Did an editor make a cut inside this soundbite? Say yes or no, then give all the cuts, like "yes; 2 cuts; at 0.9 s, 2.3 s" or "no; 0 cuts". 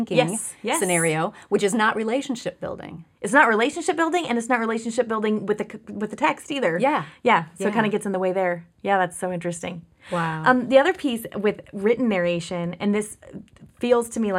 no; 0 cuts